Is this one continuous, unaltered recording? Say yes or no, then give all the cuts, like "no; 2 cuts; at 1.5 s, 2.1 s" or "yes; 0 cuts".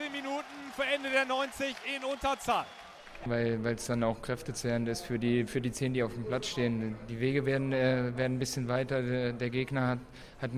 no; 1 cut; at 3.3 s